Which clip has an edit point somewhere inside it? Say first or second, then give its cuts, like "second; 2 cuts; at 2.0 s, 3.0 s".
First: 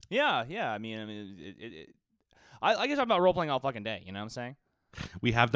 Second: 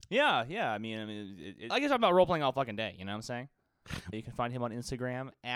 second; 2 cuts; at 1.7 s, 4.1 s